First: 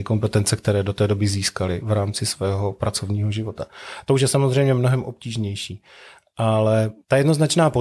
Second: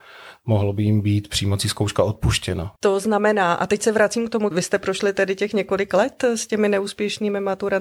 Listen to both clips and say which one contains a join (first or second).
second